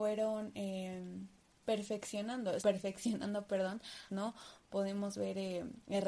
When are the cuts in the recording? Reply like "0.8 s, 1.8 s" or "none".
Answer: 2.6 s, 4.1 s